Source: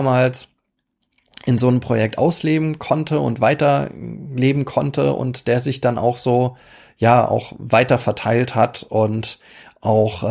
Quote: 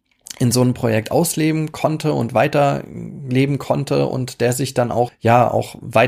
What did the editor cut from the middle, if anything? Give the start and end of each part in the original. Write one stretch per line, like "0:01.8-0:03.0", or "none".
0:06.2-0:06.9